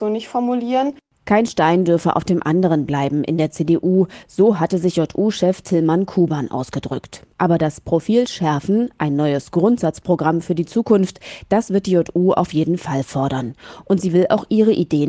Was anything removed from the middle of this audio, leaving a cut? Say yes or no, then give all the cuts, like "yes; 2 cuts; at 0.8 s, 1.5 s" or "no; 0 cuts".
no; 0 cuts